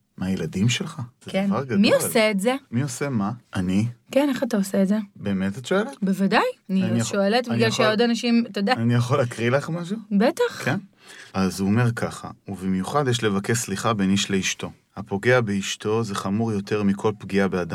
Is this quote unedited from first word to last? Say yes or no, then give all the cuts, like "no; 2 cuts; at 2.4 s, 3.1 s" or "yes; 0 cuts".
no; 2 cuts; at 3.4 s, 11.3 s